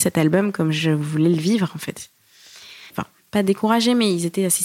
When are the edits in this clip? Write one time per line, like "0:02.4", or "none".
0:02.9